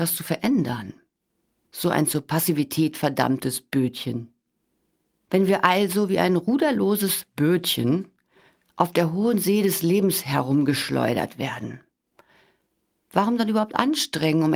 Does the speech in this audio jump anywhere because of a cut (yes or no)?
yes